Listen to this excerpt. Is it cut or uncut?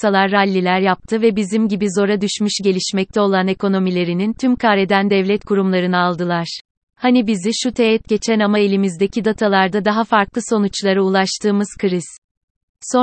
cut